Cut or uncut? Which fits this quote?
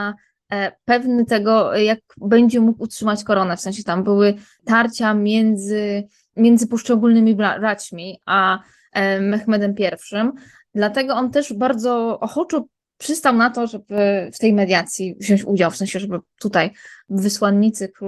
uncut